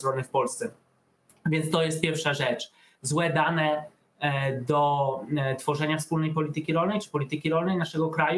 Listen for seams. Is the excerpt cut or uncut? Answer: uncut